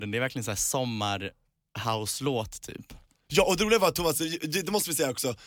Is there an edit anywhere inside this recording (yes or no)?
no